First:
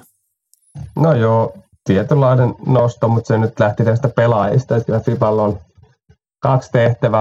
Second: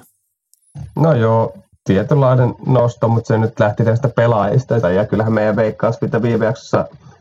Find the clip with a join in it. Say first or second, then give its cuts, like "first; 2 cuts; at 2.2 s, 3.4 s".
second; 1 cut; at 4.8 s